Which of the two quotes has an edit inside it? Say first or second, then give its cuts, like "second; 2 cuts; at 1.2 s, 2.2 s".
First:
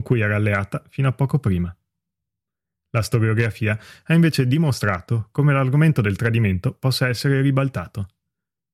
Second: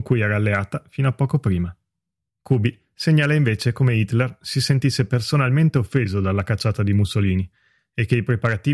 second; 1 cut; at 2.3 s